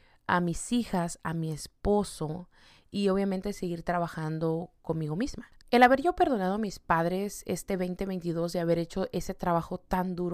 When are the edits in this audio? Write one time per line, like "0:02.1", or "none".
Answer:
0:05.6